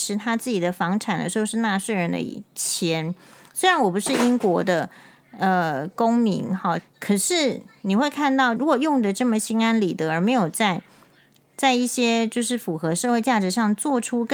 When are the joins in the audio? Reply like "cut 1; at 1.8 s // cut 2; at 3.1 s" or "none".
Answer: cut 1; at 6.8 s // cut 2; at 8.6 s